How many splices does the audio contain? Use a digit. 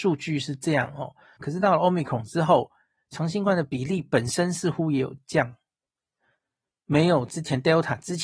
1